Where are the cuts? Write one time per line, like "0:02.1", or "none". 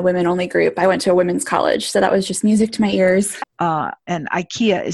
0:03.4